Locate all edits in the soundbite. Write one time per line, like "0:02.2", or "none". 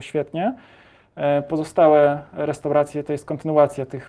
none